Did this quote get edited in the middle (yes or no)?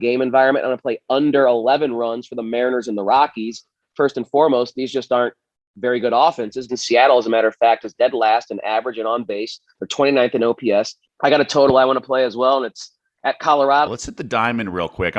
yes